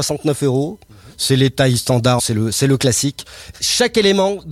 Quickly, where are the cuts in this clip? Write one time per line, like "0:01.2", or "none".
0:02.2
0:03.5